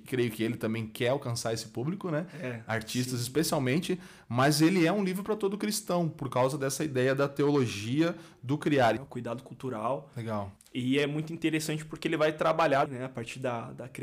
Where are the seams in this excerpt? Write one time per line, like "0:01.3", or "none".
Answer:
0:09.0
0:12.9